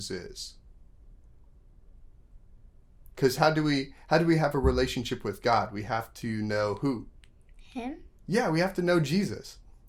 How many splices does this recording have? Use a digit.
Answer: 1